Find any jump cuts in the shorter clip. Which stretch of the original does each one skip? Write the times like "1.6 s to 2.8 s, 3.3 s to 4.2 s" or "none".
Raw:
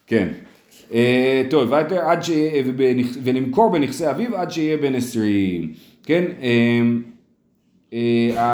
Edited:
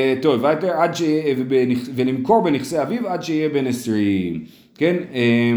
none